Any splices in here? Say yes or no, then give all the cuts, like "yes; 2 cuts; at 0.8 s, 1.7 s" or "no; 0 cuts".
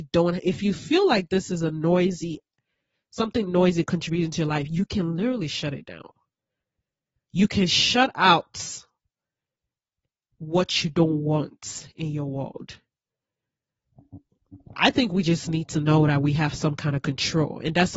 no; 0 cuts